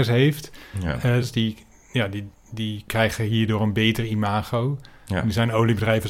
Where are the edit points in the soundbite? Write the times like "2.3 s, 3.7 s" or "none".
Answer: 1.2 s